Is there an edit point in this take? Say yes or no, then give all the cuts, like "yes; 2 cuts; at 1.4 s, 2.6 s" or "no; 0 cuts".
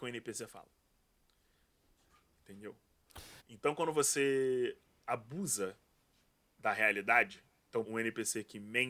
yes; 2 cuts; at 3.4 s, 7.8 s